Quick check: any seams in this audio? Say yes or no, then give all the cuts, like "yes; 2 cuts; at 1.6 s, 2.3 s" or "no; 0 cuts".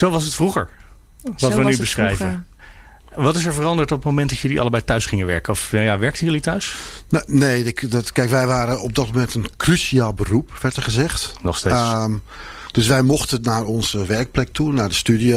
no; 0 cuts